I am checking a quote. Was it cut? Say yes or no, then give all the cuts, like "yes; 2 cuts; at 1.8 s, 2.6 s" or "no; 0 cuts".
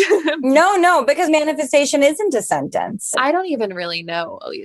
yes; 2 cuts; at 1.3 s, 3.1 s